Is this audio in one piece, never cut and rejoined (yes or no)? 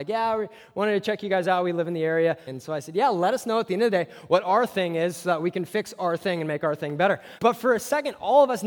no